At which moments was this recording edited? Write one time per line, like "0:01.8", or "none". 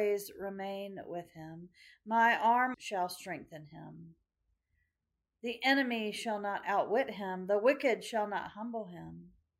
0:02.7